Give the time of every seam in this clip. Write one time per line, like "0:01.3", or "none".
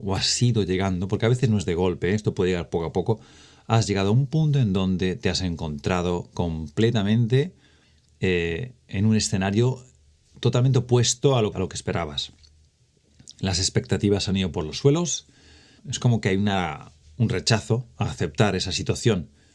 0:11.5
0:15.8